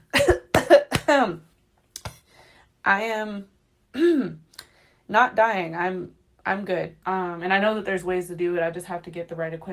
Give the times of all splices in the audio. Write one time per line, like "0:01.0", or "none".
0:07.0